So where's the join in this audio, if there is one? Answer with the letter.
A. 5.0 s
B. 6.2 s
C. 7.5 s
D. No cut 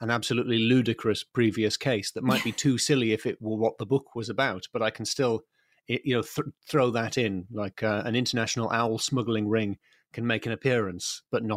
D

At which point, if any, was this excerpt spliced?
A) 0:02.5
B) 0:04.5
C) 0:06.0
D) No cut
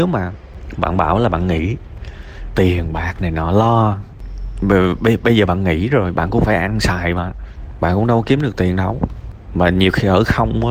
A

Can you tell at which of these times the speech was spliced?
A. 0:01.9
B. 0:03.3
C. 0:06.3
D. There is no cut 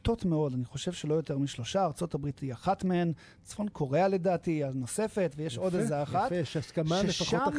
D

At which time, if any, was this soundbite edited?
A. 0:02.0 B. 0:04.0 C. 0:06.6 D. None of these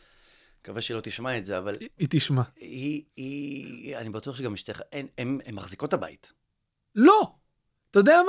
A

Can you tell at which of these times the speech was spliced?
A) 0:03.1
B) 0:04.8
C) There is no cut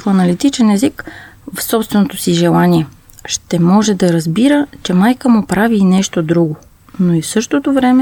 C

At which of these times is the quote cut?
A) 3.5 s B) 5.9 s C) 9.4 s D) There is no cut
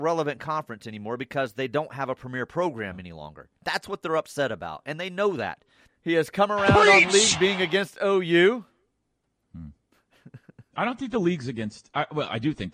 B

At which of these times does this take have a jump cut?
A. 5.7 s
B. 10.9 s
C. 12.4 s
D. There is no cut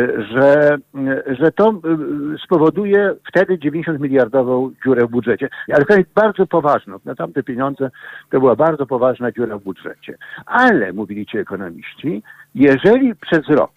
A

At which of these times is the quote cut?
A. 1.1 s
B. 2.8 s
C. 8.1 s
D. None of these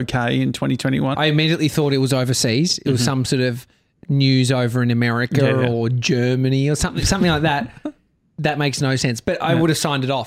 A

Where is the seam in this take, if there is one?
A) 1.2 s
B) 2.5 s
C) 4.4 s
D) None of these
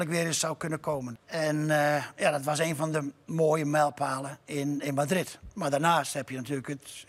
A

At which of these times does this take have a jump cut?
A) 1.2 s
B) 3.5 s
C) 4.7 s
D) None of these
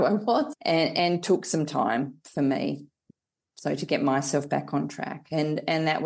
D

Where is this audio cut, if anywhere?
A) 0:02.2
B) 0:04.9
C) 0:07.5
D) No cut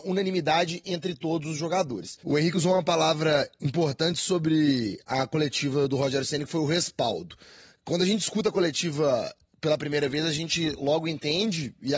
A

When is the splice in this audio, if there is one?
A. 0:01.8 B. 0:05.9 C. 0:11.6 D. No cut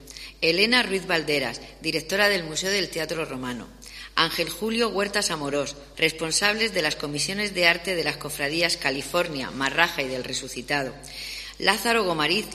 B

